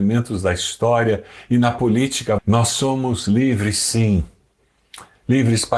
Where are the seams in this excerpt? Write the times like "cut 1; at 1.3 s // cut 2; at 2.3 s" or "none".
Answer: cut 1; at 2.4 s